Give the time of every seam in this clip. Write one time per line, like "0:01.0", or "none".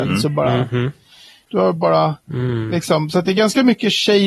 0:01.5